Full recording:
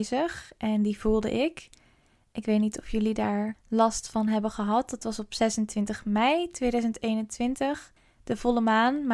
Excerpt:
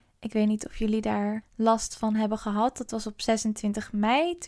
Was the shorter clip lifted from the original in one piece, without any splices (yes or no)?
yes